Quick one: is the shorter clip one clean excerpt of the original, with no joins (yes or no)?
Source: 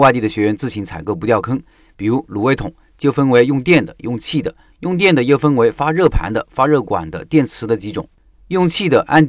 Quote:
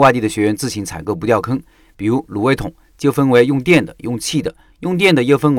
yes